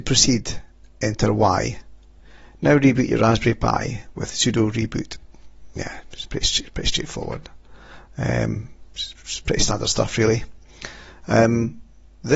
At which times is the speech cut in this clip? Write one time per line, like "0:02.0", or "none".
0:08.1